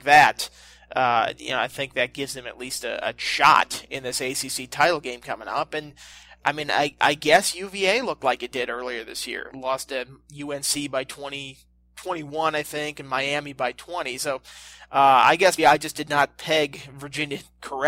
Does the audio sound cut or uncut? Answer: cut